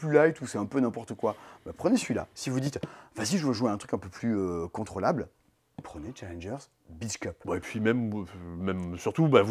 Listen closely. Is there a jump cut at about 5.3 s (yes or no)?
no